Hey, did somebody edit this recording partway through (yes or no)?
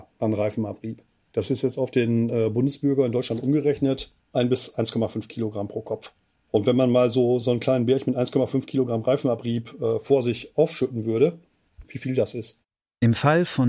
yes